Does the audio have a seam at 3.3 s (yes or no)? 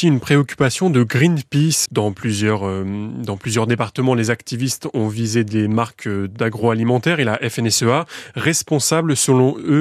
no